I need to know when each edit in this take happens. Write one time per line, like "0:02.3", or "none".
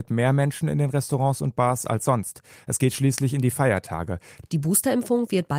0:04.4